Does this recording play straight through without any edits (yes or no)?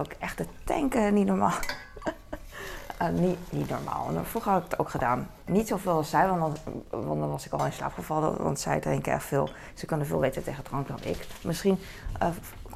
yes